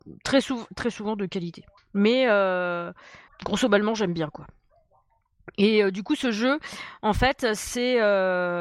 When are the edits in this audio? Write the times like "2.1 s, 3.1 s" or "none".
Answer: 1.8 s, 3.3 s